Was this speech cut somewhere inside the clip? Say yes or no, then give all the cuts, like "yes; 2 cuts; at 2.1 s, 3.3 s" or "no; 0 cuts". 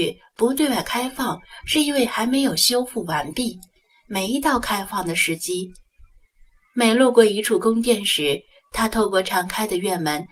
no; 0 cuts